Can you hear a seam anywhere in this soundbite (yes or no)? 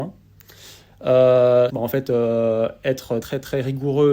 yes